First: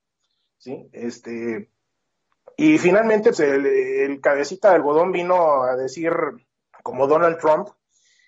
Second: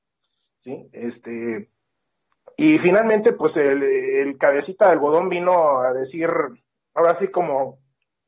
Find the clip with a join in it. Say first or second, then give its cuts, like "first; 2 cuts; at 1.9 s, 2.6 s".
first; 2 cuts; at 3.3 s, 6.7 s